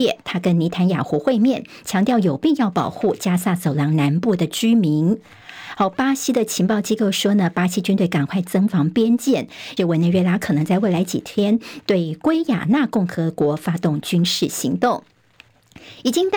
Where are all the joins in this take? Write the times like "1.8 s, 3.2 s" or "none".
9.8 s